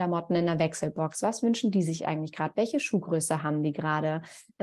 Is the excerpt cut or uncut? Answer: uncut